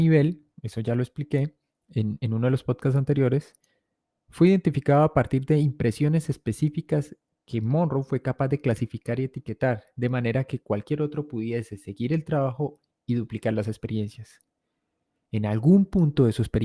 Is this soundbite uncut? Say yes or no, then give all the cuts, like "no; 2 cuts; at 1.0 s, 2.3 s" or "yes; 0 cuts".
yes; 0 cuts